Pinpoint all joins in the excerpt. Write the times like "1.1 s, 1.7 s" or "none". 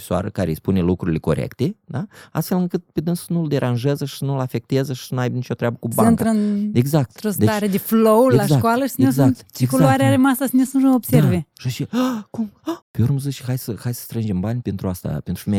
12.8 s, 14.6 s

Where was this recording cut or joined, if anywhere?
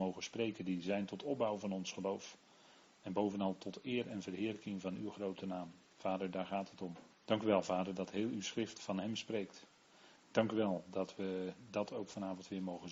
7.1 s

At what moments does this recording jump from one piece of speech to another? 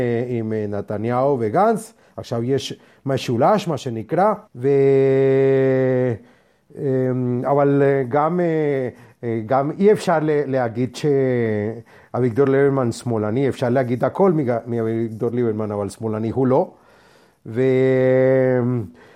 4.5 s

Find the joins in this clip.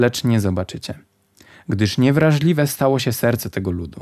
none

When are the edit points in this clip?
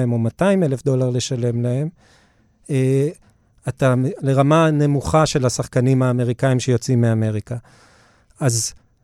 4.2 s

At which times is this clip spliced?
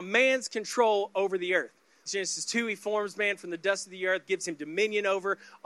2.1 s, 4.3 s

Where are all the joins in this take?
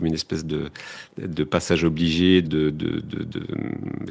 2.4 s

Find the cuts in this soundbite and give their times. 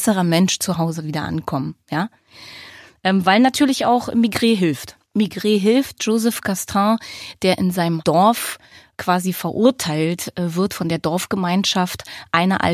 5.1 s

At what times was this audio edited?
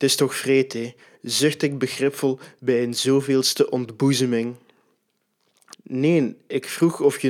5.7 s

